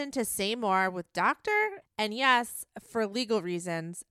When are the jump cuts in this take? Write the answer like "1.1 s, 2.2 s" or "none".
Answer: 1.8 s